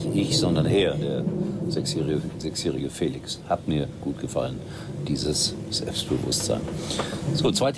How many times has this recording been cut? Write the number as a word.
zero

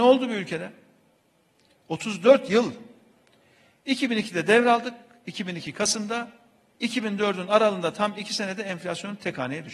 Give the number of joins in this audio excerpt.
zero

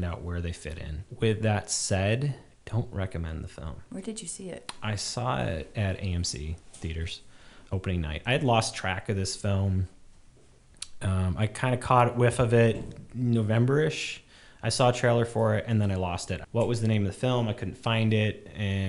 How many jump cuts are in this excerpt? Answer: two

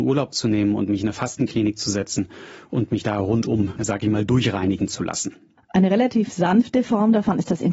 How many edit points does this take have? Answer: one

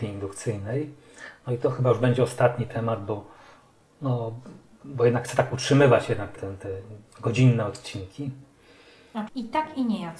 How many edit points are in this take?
two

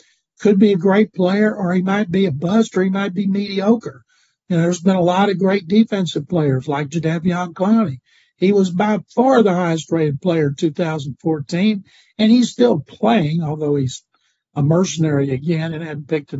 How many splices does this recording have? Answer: zero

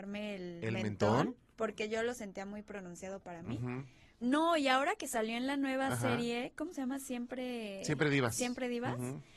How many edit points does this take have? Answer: one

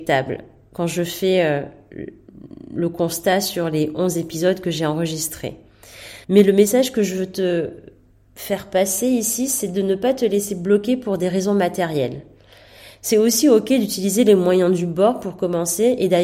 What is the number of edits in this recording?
one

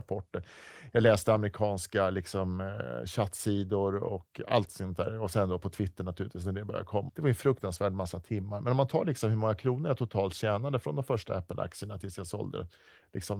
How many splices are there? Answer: one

